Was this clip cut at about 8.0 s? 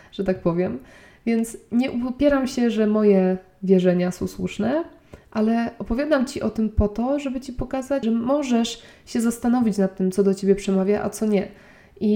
yes; 1 cut; at 8.0 s

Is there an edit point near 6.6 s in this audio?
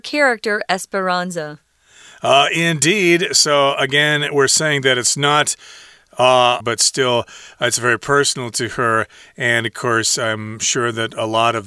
yes; 1 cut; at 6.6 s

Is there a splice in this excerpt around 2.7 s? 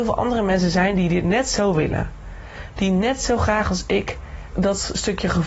no; 1 cut; at 4.5 s

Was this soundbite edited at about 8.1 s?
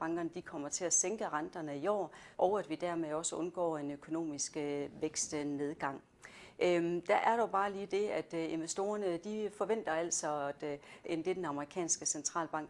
no; 2 cuts; at 2.3 s, 11.0 s

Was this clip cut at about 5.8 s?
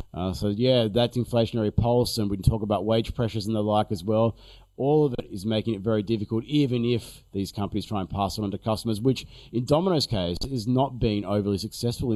no; 0 cuts

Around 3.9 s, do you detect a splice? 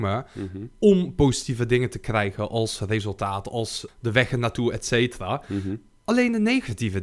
yes; 1 cut; at 3.9 s

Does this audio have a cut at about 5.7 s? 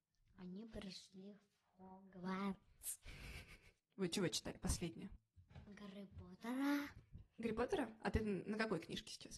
no; 1 cut; at 3.8 s

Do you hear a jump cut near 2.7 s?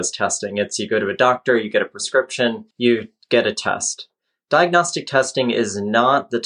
yes; 1 cut; at 2.7 s

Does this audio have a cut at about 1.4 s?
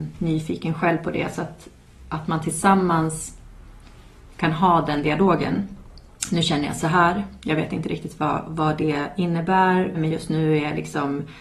no; 1 cut; at 9.9 s

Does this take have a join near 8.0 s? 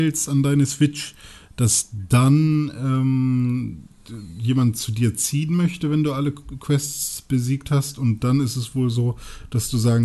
no; 0 cuts

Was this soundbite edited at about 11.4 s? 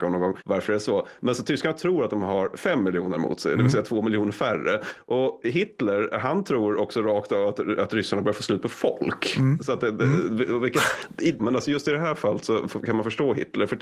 yes; 1 cut; at 11.4 s

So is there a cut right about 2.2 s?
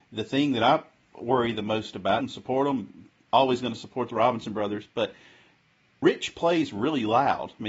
yes; 1 cut; at 2.2 s

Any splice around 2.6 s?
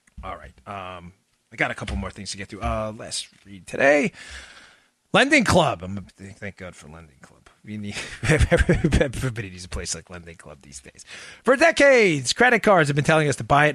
no; 1 cut; at 6.1 s

